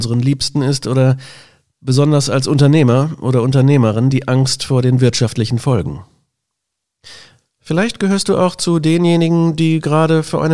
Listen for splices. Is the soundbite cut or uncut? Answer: cut